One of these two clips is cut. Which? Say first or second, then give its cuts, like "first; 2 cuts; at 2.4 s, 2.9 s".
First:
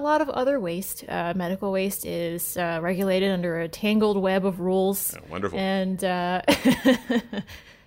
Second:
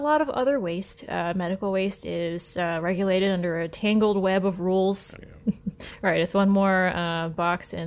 second; 1 cut; at 5.1 s